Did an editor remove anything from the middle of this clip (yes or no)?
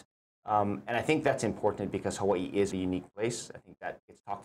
yes